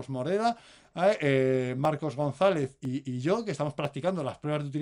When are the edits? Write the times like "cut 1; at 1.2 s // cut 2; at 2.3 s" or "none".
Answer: none